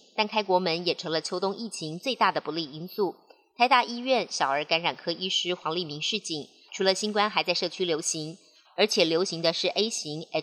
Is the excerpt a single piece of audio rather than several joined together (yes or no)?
no